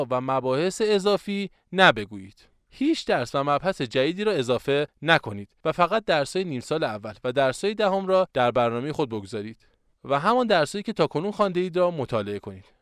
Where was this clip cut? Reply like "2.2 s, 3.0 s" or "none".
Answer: 10.0 s